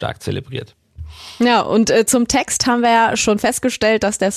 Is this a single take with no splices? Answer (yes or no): yes